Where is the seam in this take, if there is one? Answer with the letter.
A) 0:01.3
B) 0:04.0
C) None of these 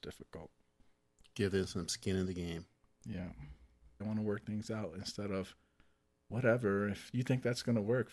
B